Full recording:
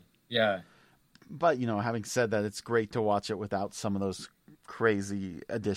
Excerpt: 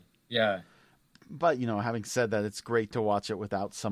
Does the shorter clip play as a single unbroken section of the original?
yes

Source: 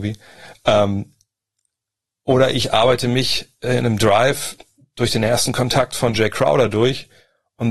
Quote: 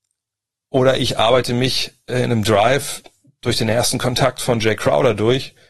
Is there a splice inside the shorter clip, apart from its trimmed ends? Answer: no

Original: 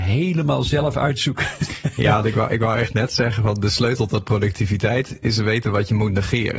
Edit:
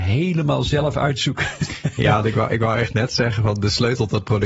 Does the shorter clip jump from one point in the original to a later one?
no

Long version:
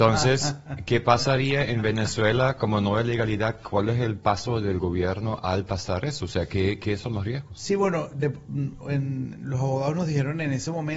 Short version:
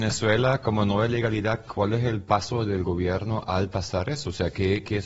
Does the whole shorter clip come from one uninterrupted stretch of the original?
yes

